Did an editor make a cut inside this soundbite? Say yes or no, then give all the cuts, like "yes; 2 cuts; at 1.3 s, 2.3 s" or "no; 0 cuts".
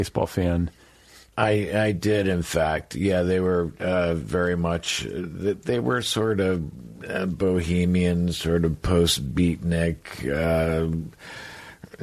yes; 1 cut; at 1.3 s